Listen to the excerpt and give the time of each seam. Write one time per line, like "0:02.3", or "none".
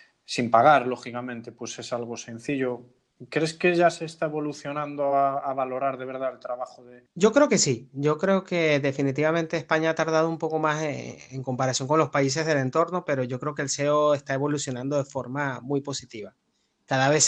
none